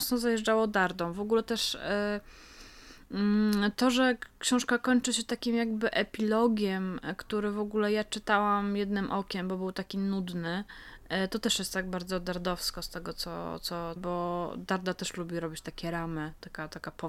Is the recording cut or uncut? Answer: cut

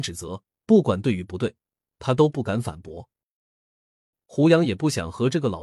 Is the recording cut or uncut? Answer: uncut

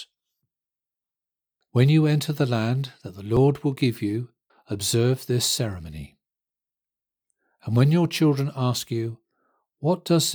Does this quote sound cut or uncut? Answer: cut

